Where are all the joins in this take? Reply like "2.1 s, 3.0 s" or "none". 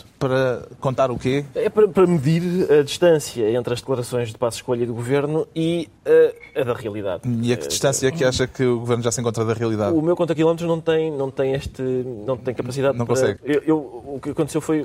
13.4 s